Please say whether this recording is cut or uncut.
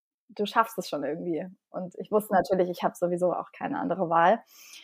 uncut